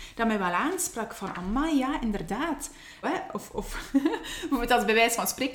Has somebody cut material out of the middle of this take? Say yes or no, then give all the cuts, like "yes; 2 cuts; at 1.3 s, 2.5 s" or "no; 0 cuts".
yes; 1 cut; at 3.0 s